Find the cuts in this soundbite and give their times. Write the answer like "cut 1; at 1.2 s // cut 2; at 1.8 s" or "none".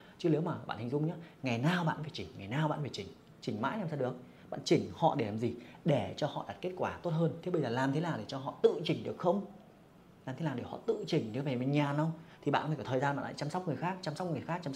none